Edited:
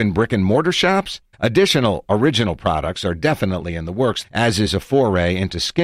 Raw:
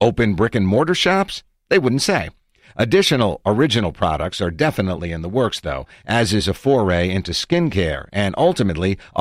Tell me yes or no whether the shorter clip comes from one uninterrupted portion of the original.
no